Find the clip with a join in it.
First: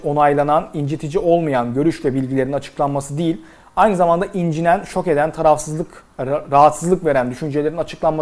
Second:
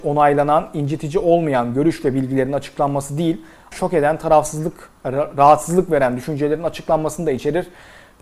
second; 1 cut; at 3.7 s

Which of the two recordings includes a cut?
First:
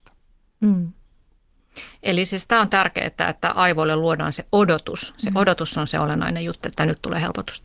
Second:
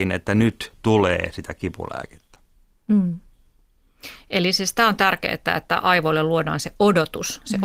first; 1 cut; at 6.6 s

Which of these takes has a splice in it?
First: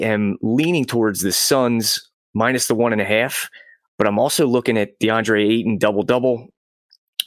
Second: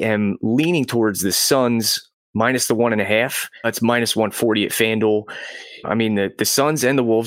second; 2 cuts; at 3.6 s, 5.8 s

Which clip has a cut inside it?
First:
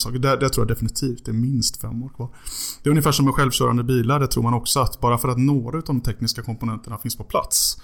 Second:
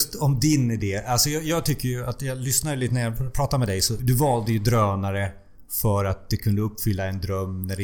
second; 1 cut; at 4.0 s

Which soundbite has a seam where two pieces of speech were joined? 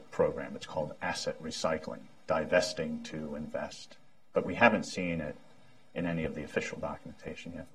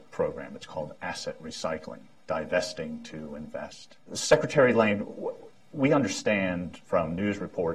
second; 1 cut; at 4.1 s

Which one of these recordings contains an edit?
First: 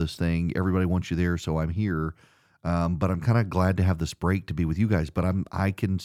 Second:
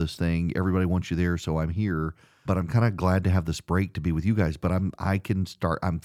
second; 1 cut; at 2.5 s

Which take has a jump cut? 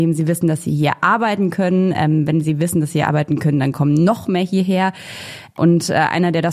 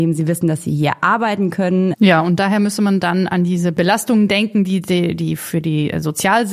second; 1 cut; at 1.9 s

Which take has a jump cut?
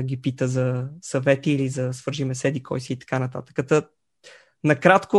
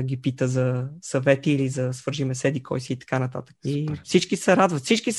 second; 1 cut; at 3.6 s

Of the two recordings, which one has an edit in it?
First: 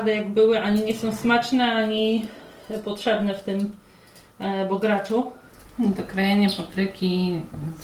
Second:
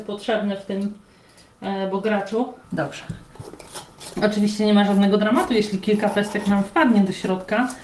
second; 2 cuts; at 2.6 s, 4.2 s

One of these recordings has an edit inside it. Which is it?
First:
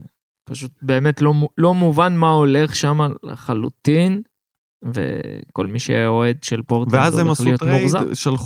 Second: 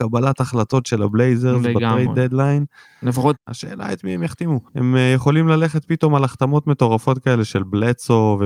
second; 2 cuts; at 3.3 s, 4.7 s

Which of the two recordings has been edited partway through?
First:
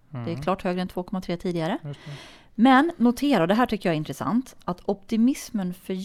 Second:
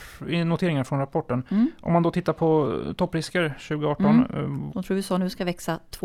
second; 1 cut; at 4.7 s

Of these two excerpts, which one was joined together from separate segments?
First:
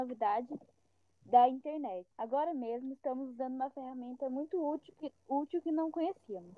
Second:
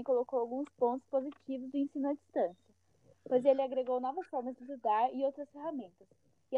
first; 1 cut; at 2.1 s

